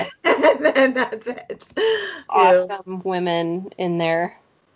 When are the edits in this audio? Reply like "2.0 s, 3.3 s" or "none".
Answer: 2.3 s